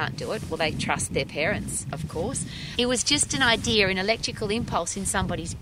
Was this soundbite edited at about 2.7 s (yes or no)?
yes